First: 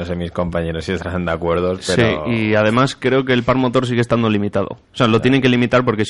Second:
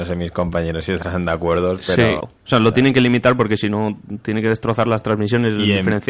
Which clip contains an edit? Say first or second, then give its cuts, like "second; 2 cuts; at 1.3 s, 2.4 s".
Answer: second; 1 cut; at 2.2 s